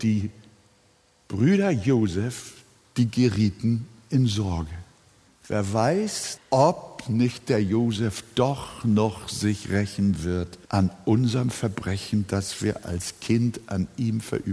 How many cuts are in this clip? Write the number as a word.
three